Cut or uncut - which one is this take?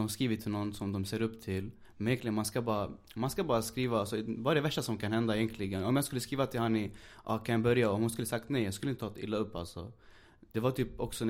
cut